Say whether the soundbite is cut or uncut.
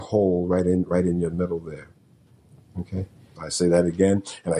cut